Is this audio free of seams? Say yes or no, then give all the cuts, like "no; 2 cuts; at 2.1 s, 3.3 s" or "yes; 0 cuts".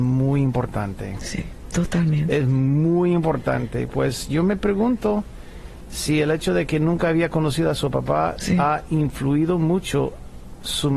yes; 0 cuts